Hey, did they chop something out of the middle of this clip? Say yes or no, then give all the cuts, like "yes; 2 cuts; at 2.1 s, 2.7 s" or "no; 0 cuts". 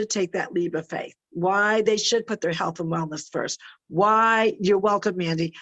no; 0 cuts